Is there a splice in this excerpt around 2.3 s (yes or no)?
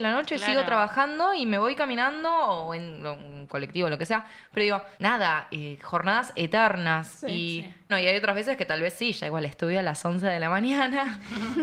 no